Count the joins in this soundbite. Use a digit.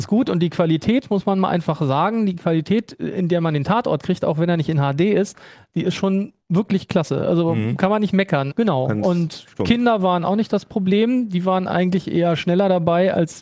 2